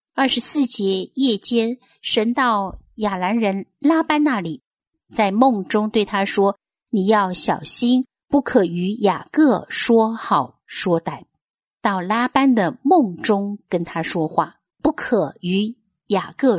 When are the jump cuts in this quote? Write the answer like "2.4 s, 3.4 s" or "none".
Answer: 11.7 s, 14.7 s